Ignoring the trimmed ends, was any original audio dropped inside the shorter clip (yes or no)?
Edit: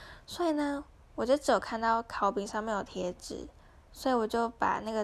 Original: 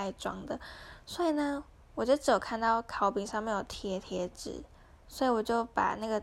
yes